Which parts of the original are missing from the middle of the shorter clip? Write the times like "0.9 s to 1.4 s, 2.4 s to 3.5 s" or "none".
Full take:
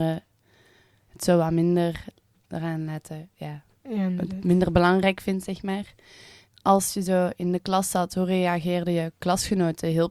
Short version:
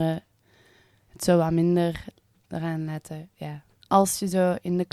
3.8 s to 6.5 s